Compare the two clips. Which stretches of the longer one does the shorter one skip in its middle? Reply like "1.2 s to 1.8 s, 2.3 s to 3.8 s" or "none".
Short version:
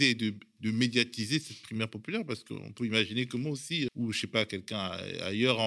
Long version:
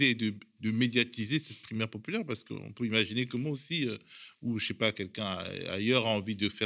3.9 s to 4.3 s

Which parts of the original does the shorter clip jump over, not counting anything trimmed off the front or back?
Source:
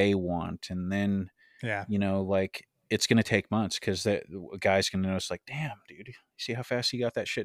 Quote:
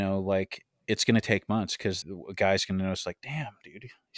4.0 s to 4.3 s

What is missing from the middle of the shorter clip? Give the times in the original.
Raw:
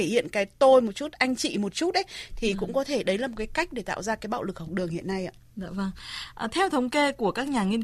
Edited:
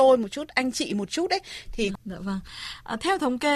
2.6 s to 5.5 s

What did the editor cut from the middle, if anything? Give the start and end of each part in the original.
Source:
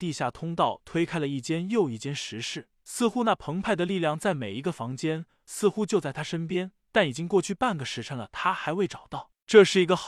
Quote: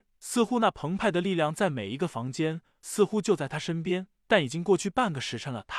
none

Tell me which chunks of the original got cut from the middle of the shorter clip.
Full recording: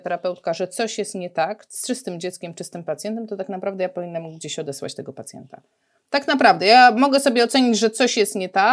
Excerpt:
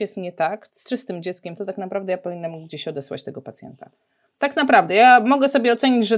2.5 s to 3.3 s

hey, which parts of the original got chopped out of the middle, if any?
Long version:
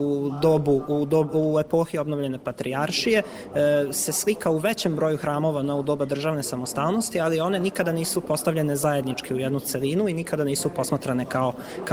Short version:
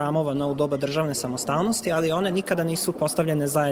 none

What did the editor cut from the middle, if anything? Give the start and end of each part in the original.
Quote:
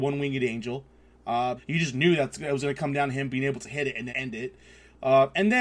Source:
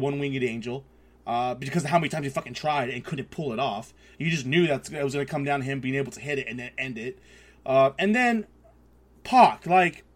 1.6 s to 4.1 s, 6.6 s to 6.7 s

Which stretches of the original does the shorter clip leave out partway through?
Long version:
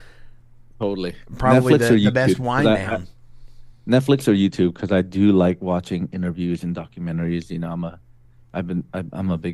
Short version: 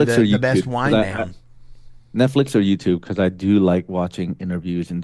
none

